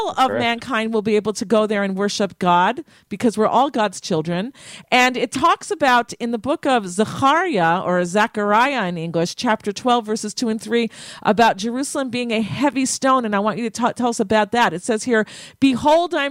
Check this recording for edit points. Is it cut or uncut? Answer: uncut